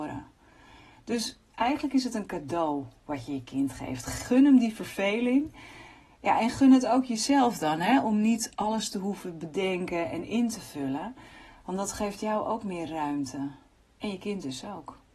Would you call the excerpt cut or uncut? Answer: uncut